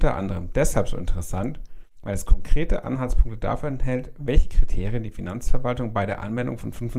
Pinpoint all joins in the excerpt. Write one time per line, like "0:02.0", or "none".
none